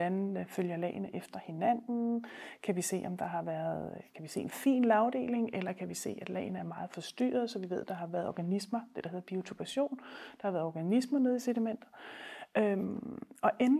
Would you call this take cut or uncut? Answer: uncut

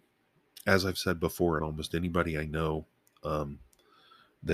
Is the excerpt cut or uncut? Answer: uncut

